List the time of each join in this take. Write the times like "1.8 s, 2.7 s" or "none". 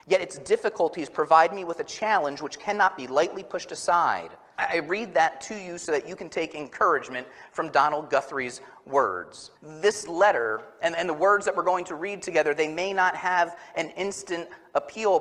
4.6 s, 9.6 s

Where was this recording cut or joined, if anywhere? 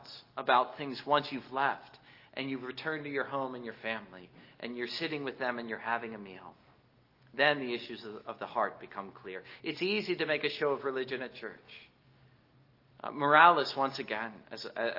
12.9 s

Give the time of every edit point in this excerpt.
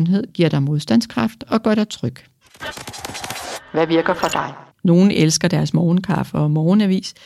4.7 s

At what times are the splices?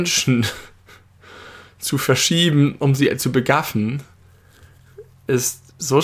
none

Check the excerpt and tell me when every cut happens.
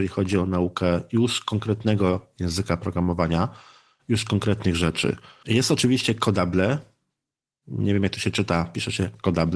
none

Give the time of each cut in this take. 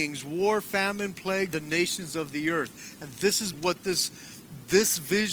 1.5 s, 3.5 s

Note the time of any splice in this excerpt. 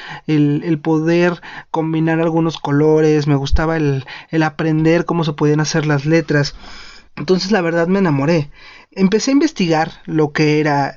7.1 s

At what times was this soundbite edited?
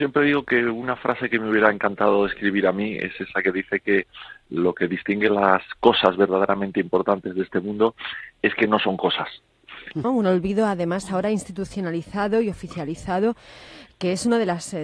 10.0 s

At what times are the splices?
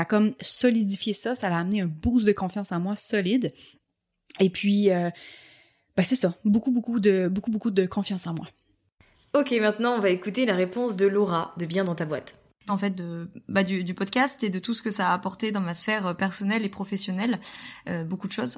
12.7 s

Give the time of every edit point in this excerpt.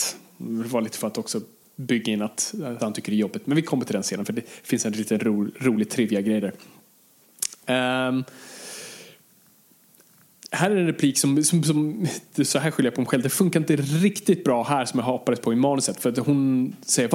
2.8 s

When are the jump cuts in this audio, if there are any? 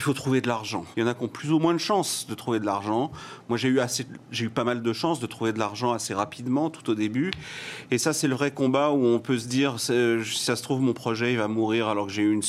0.9 s

